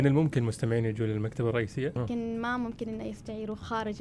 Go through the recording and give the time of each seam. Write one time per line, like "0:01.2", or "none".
0:02.0